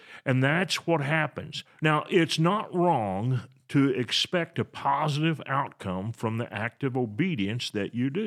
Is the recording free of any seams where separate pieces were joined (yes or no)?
no